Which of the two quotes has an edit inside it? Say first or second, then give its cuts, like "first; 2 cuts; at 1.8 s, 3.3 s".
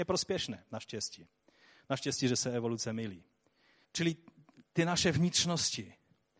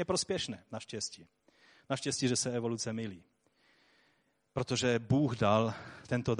first; 1 cut; at 3.8 s